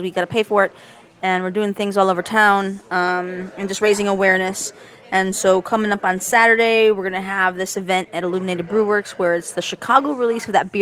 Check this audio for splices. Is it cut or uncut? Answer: uncut